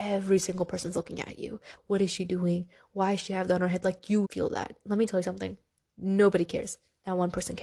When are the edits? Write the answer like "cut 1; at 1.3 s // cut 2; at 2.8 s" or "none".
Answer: cut 1; at 1.8 s // cut 2; at 4.2 s // cut 3; at 5.8 s